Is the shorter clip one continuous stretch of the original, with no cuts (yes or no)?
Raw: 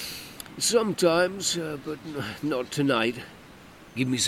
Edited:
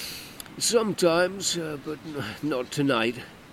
yes